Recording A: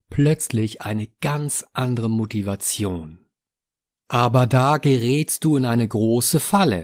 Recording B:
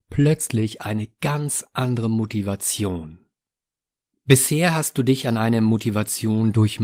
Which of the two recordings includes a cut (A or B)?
A